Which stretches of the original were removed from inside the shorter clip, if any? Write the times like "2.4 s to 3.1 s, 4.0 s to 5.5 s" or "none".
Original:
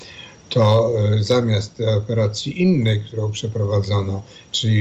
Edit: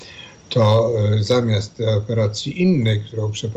none